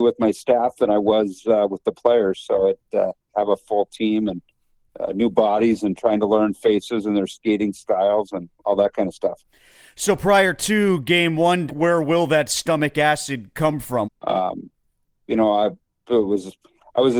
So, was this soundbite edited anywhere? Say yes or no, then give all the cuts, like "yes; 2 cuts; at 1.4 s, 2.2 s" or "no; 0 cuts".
yes; 3 cuts; at 3.3 s, 11.7 s, 14.0 s